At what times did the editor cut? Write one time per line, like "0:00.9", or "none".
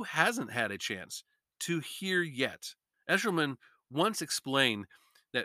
0:02.9

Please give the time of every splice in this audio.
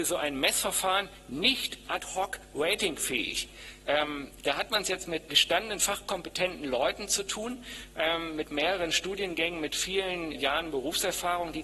0:05.3
0:10.3

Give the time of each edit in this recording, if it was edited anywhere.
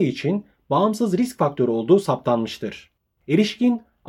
0:03.2

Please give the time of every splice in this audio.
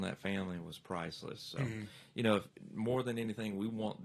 none

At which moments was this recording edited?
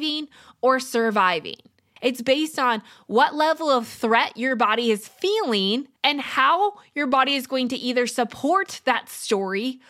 0:02.0
0:06.0

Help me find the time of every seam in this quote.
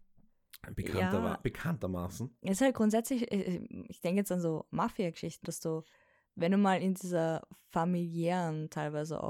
0:05.4

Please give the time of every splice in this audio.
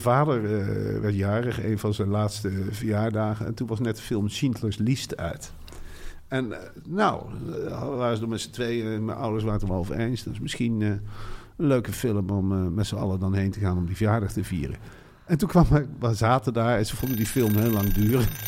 none

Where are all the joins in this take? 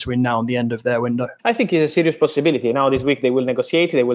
0:01.4

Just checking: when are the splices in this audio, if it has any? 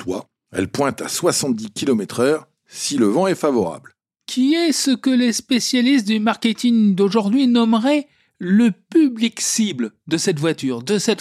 none

